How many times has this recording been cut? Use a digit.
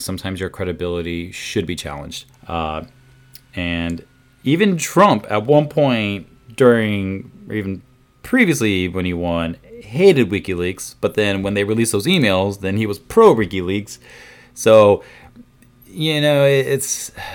1